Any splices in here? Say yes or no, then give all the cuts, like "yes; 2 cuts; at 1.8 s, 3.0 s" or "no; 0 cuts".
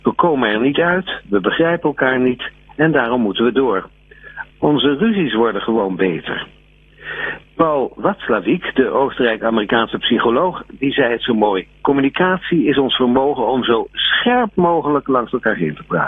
yes; 2 cuts; at 4.5 s, 7.4 s